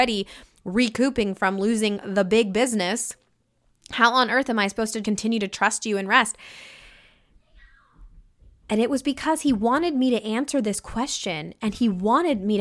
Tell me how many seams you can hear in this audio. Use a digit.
1